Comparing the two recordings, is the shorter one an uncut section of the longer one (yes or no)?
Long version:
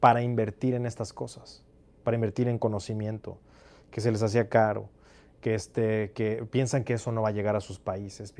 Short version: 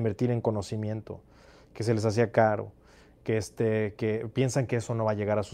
yes